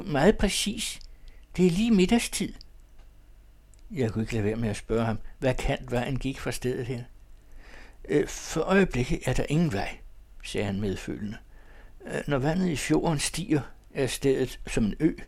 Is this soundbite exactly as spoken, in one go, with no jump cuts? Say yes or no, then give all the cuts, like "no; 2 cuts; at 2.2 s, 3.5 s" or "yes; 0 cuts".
yes; 0 cuts